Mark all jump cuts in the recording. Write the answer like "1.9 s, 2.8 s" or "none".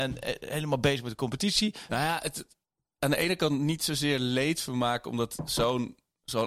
1.9 s

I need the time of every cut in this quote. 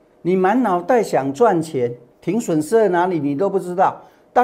2.1 s

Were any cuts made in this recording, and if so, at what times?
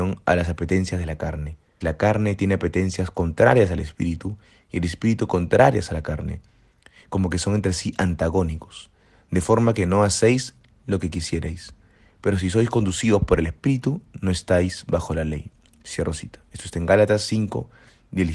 1.8 s

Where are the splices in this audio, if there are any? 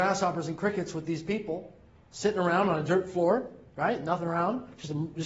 none

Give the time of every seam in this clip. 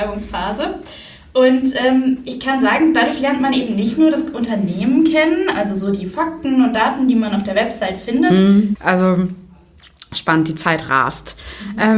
8.8 s

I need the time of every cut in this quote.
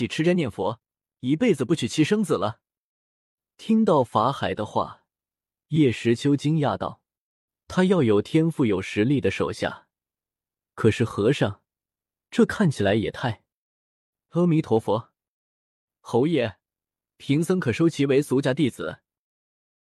none

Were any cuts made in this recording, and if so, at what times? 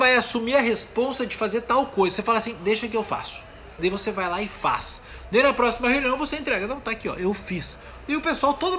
3.8 s

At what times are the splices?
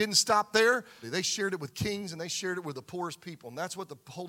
1.0 s

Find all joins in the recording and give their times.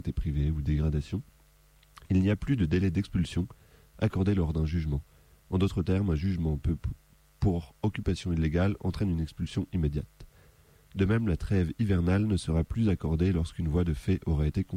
none

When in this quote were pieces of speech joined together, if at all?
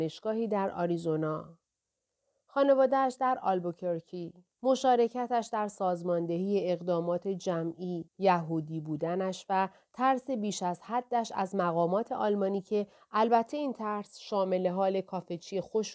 4.5 s, 8.1 s

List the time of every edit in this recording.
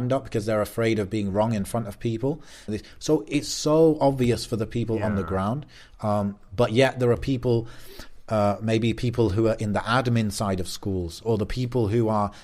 2.7 s

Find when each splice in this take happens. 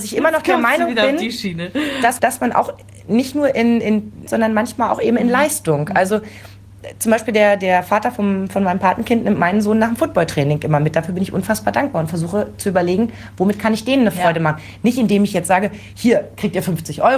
2.2 s, 4.3 s

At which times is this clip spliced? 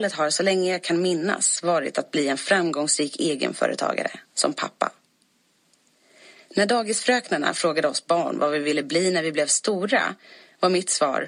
4.2 s

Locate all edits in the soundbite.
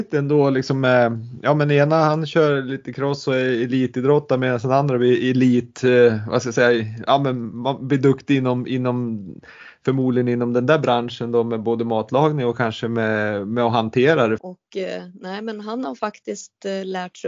14.4 s

